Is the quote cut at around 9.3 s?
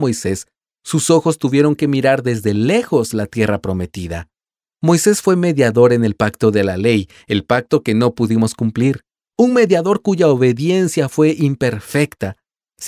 yes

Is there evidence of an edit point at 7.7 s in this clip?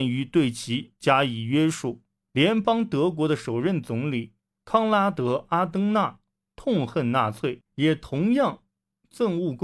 yes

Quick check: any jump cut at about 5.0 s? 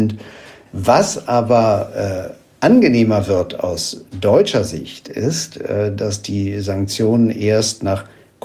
no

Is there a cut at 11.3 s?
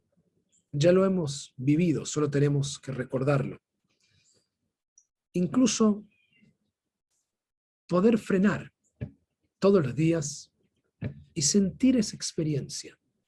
yes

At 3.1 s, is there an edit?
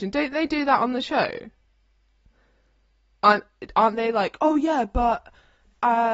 yes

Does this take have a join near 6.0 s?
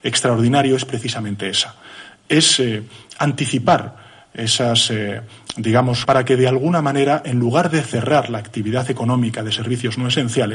yes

